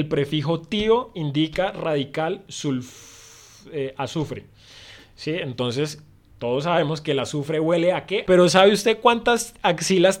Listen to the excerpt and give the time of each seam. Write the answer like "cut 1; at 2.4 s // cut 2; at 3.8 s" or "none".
cut 1; at 8.3 s